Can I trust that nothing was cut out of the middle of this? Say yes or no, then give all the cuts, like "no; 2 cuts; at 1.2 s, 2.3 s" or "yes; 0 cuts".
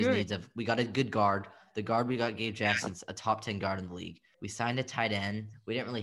no; 1 cut; at 4.3 s